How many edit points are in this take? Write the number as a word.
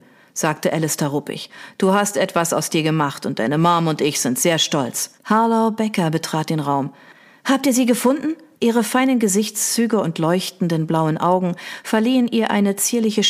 two